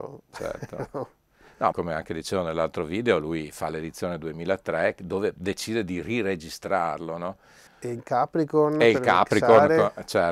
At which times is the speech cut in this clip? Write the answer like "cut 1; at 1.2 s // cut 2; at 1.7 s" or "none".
cut 1; at 1.7 s // cut 2; at 7.7 s